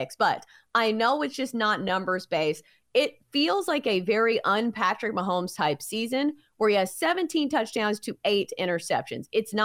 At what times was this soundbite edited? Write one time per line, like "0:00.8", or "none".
0:02.8